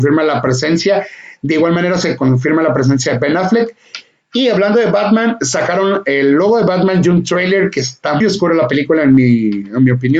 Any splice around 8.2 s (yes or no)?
yes